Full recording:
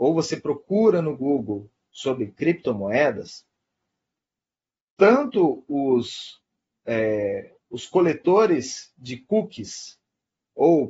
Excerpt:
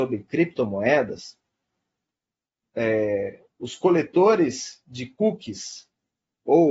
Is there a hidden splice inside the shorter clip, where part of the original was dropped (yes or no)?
yes